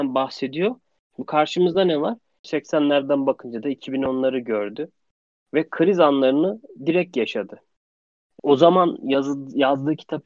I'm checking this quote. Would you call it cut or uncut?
cut